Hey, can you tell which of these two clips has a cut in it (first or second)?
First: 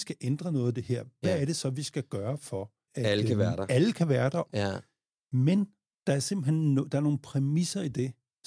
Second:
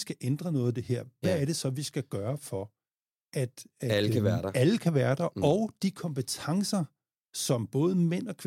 first